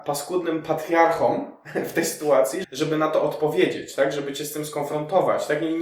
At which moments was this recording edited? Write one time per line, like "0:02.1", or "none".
0:02.6